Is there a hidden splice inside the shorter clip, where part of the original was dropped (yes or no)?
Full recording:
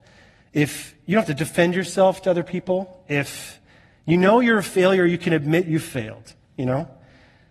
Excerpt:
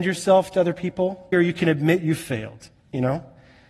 yes